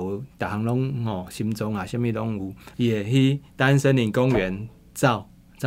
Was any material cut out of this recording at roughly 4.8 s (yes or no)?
no